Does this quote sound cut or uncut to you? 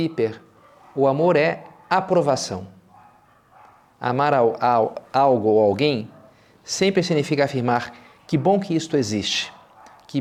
uncut